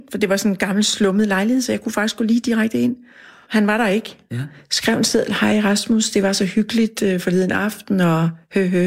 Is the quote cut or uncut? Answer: cut